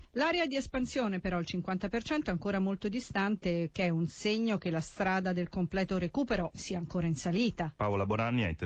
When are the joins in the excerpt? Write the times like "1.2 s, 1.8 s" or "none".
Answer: 7.7 s